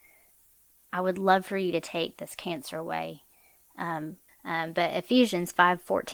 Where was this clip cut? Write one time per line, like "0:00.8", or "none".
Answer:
0:04.3